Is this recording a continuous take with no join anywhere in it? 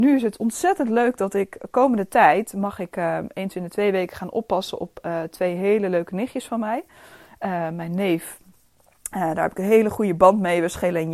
yes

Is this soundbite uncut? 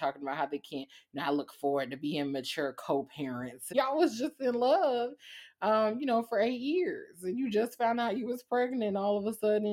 no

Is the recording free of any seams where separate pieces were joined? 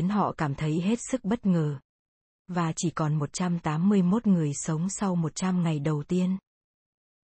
no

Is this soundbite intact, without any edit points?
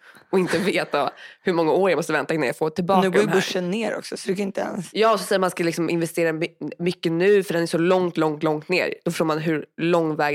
yes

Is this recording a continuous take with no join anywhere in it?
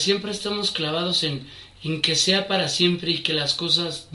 yes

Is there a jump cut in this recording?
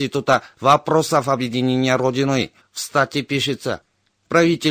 yes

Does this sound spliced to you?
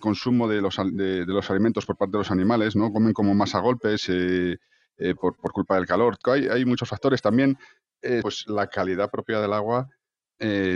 yes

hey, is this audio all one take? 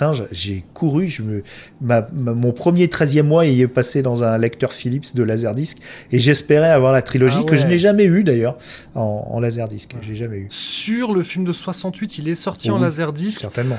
yes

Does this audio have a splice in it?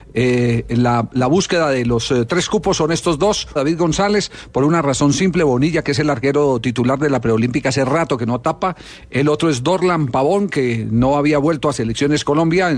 yes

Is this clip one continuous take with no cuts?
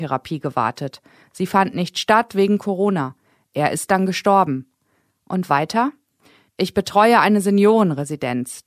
yes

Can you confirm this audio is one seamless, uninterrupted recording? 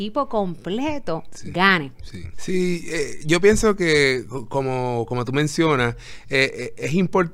no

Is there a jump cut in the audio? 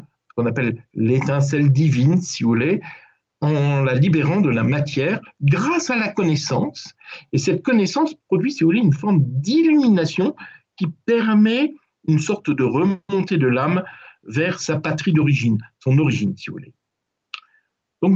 no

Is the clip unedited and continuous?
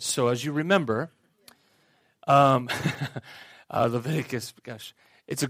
yes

